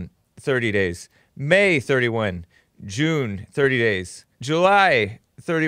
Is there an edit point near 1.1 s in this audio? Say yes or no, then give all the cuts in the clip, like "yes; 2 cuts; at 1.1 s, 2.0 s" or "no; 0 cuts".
no; 1 cut; at 4.3 s